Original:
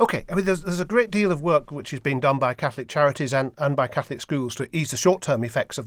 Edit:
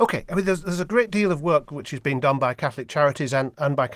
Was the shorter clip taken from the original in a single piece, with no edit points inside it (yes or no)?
yes